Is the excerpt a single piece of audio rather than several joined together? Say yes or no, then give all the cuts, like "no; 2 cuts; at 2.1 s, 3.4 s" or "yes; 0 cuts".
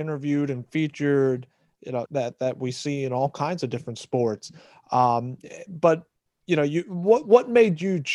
no; 1 cut; at 2.1 s